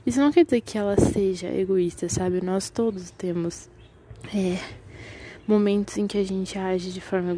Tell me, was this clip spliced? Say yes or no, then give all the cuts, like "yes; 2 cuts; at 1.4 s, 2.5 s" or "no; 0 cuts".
no; 0 cuts